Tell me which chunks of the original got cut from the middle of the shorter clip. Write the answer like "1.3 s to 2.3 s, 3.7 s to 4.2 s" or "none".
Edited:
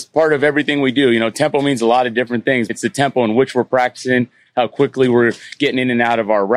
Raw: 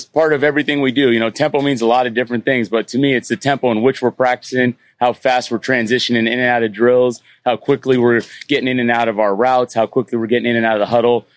2.7 s to 3.2 s, 4.9 s to 7.3 s

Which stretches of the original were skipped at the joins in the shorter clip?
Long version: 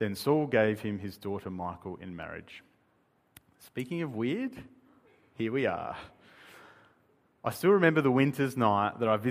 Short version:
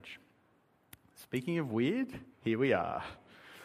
4.7 s to 5.2 s

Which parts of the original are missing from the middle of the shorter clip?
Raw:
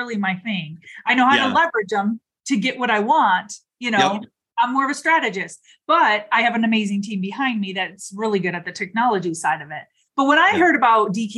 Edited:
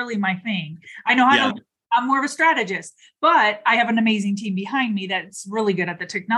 1.5 s to 4.2 s

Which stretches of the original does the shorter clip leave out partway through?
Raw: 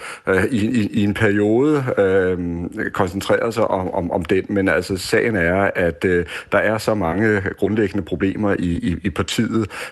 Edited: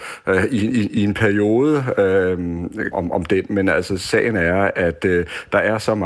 2.9 s to 3.9 s

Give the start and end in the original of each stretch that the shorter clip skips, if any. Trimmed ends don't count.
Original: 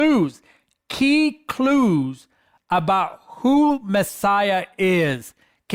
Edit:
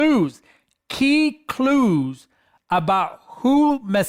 none

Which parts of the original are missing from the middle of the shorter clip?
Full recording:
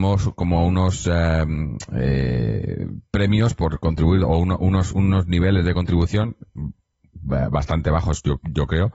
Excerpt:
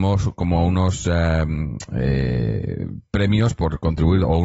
none

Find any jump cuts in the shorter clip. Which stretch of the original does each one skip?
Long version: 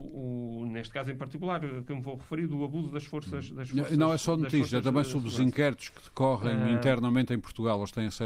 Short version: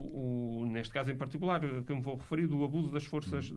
none

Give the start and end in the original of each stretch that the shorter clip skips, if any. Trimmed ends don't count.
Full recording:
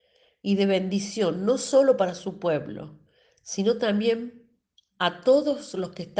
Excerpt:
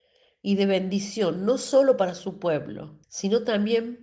3.0 s to 3.4 s

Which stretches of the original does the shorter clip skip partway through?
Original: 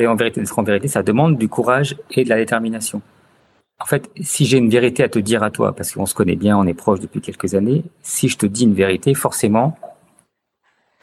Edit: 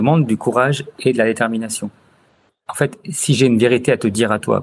none

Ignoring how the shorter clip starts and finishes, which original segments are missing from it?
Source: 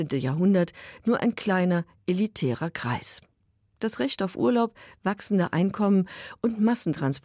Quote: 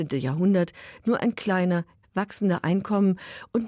2.0 s to 4.9 s

